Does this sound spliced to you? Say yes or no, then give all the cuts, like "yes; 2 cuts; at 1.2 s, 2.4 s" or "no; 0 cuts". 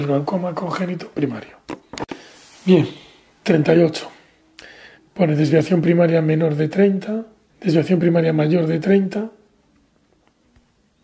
yes; 2 cuts; at 4.9 s, 7.5 s